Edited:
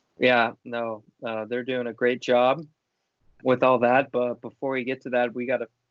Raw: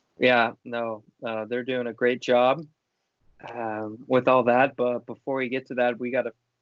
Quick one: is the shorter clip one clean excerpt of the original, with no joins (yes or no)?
no